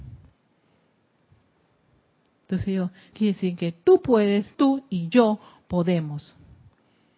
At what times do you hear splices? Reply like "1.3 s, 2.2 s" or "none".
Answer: 3.1 s, 4.5 s